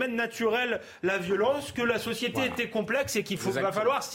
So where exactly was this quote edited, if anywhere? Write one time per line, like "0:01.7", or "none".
none